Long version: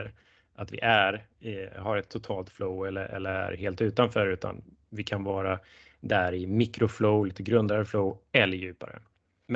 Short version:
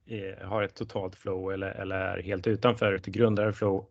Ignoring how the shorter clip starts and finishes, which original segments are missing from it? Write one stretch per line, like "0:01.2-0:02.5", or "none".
0:04.3-0:07.3